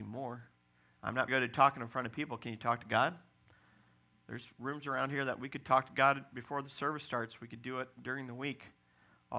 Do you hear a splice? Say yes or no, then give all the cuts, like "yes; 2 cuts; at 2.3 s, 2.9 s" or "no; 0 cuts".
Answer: yes; 1 cut; at 1.3 s